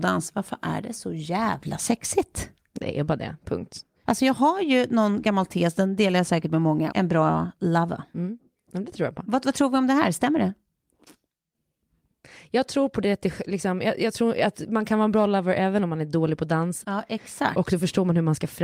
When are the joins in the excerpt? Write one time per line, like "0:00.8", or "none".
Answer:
0:06.9
0:16.8